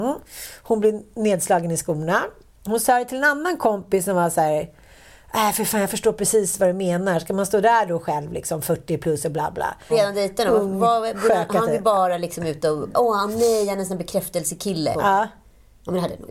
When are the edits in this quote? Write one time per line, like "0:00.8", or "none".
0:09.9
0:14.9